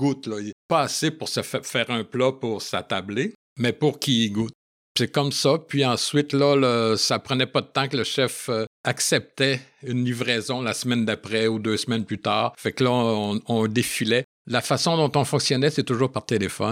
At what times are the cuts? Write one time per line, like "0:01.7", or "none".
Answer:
none